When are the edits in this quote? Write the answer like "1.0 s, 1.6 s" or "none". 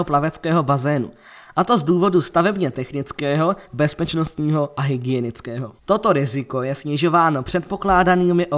3.7 s, 5.8 s